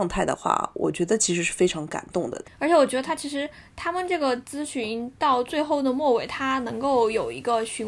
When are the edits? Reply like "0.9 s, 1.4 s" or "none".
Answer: 2.4 s